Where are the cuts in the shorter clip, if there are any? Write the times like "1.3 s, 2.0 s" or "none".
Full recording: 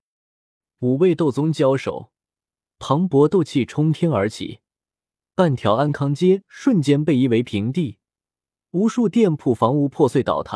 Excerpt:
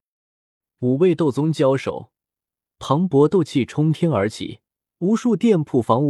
4.8 s